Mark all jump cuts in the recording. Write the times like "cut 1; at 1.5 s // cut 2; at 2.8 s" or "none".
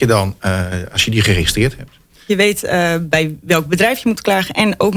cut 1; at 2.3 s